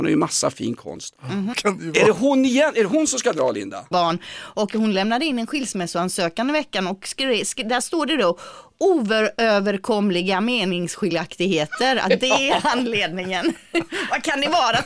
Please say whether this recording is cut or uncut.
cut